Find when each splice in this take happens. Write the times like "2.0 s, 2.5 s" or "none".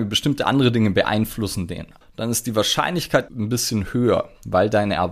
2.0 s, 3.3 s